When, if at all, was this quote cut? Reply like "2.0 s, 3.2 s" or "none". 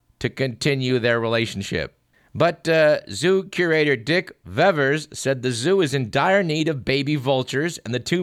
none